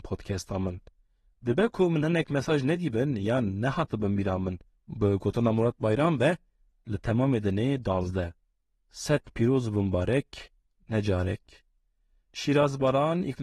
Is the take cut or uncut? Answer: cut